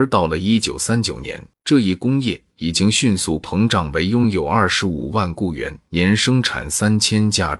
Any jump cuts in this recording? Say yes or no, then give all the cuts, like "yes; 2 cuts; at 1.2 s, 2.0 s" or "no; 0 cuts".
yes; 1 cut; at 1.5 s